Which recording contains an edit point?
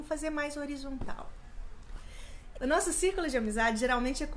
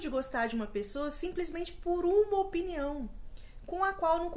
first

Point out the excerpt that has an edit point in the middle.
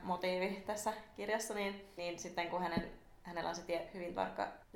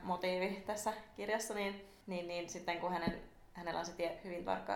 first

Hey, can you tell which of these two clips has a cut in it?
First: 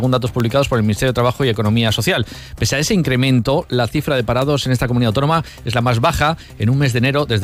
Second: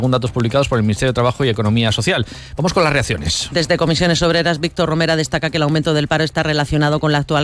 second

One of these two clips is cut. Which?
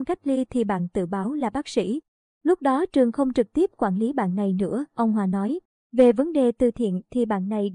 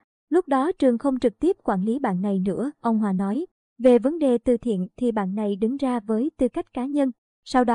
first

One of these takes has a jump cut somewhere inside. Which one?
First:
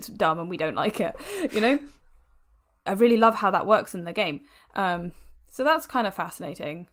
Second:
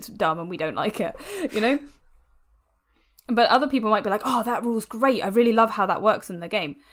first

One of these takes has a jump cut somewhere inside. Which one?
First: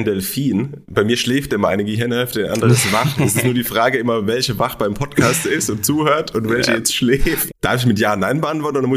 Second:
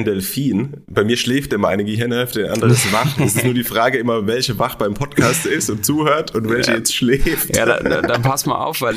first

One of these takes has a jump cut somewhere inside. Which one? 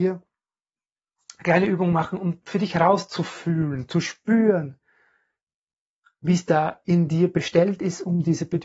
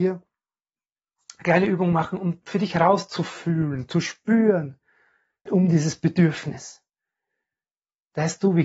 second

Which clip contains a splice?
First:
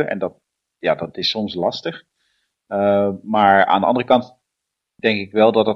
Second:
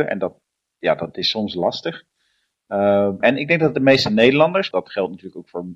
second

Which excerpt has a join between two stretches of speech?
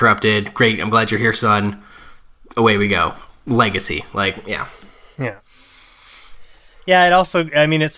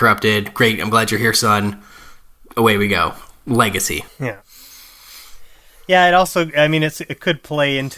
second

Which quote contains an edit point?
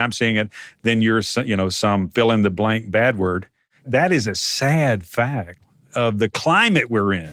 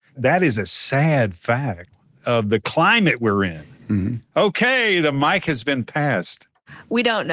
second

